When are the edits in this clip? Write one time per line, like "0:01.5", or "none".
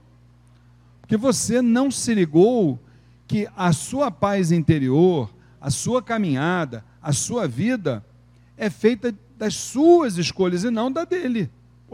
none